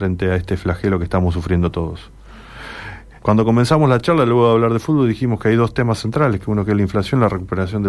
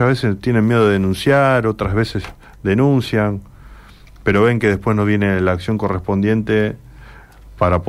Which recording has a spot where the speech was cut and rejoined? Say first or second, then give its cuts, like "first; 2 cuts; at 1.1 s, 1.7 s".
first; 1 cut; at 3.2 s